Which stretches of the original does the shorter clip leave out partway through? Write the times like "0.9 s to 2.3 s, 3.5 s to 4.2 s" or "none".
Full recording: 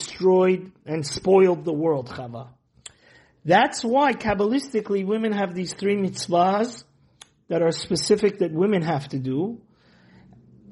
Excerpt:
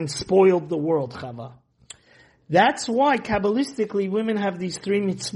none